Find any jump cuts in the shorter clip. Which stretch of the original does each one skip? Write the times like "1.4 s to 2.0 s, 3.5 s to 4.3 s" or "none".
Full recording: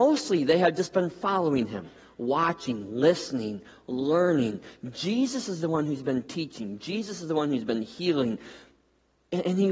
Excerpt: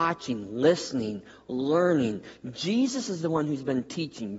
none